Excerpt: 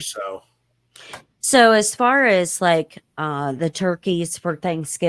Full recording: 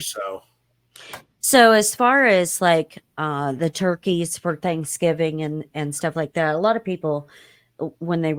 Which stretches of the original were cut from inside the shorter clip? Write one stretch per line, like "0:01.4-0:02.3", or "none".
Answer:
none